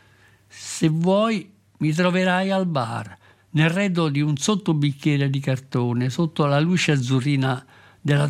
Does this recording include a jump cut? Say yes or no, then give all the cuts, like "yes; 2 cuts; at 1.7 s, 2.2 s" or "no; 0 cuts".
no; 0 cuts